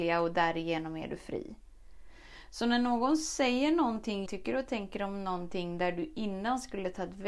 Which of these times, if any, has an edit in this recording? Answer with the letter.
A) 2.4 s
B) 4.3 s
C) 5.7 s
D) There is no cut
B